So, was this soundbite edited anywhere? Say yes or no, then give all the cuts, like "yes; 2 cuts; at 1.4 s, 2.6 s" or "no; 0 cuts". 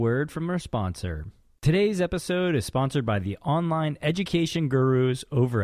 no; 0 cuts